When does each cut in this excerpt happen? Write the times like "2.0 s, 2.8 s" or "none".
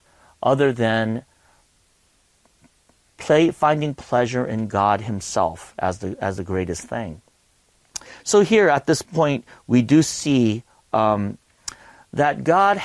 none